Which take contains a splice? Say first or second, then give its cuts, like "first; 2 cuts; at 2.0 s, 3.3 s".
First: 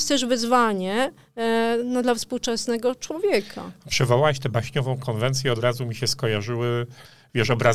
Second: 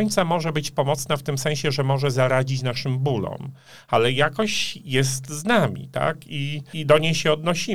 second; 1 cut; at 6.7 s